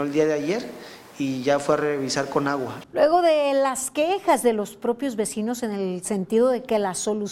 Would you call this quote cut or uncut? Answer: cut